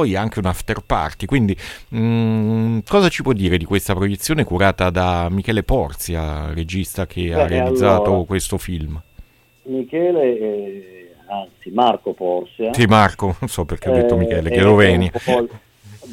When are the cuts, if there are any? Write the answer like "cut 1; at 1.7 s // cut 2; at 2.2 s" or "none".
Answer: none